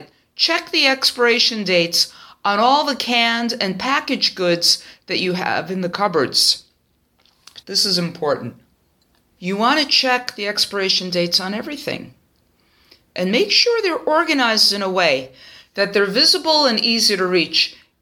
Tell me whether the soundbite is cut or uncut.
cut